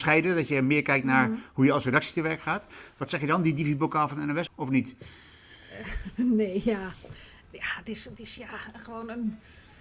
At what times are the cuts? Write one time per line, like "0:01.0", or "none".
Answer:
0:04.5